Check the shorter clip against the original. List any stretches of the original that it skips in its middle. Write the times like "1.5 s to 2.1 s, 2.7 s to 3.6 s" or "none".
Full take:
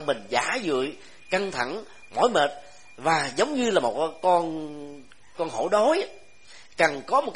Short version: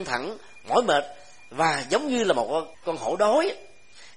4.2 s to 5.3 s